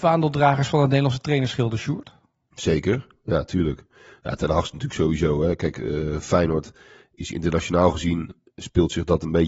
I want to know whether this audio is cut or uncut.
uncut